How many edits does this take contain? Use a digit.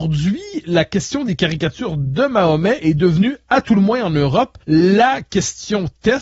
1